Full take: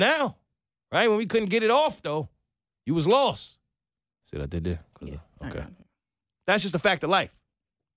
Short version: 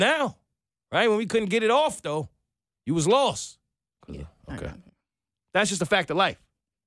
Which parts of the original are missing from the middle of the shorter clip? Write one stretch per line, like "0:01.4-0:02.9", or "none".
0:04.0-0:04.9